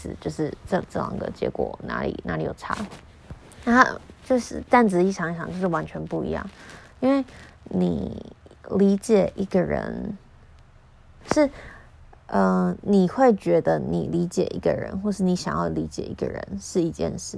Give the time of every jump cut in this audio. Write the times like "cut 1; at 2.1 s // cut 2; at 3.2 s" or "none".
none